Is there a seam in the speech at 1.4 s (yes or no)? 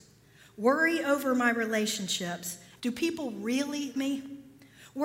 no